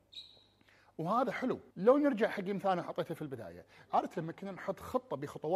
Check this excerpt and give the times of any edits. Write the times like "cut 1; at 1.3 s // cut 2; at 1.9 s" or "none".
cut 1; at 1.7 s // cut 2; at 3.9 s